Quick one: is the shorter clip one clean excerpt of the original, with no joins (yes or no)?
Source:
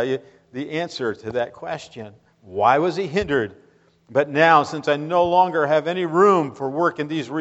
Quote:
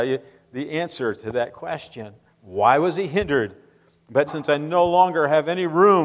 no